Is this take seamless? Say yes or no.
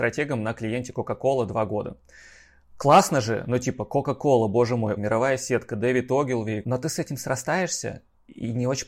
no